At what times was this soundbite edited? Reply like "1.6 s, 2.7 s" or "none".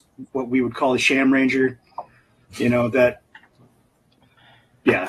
none